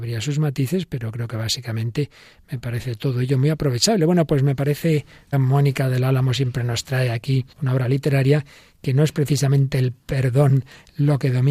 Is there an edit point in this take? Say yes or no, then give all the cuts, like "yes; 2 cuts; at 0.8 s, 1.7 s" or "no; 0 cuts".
yes; 2 cuts; at 5.3 s, 7.5 s